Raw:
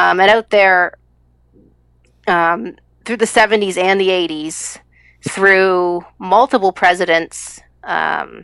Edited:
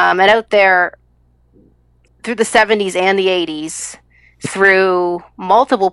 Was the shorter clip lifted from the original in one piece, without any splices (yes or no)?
no